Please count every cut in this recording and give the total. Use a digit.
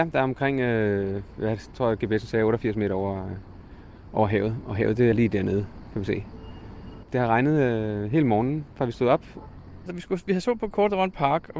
3